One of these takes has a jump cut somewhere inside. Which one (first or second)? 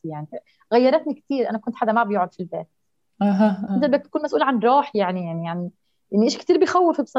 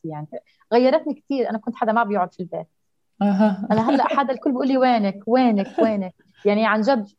first